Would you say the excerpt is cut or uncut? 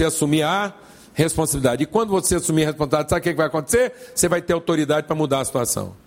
uncut